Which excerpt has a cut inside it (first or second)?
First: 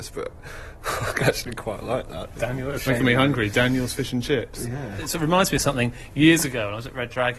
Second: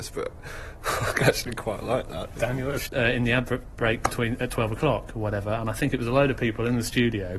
second